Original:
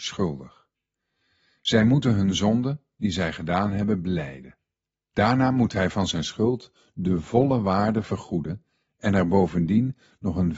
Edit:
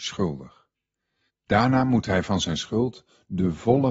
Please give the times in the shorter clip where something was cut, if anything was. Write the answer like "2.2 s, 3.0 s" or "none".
1.3 s